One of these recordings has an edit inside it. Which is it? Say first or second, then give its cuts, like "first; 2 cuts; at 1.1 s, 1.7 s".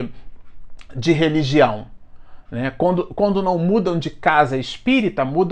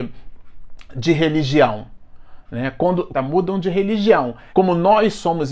second; 2 cuts; at 3.1 s, 4.5 s